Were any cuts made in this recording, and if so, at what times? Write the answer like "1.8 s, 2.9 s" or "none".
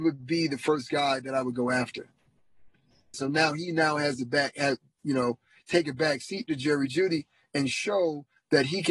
3.1 s

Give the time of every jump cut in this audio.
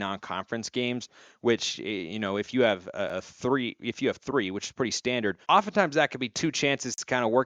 5.4 s

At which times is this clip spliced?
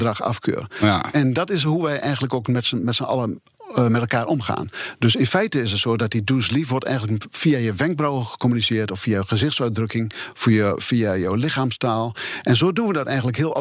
none

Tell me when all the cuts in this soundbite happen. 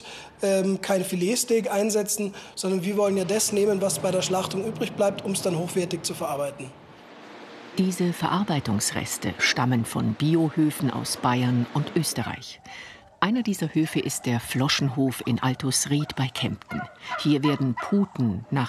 none

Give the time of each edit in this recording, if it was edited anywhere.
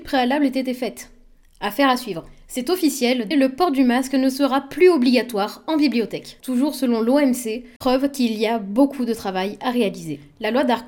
3.3 s, 6.4 s, 7.8 s

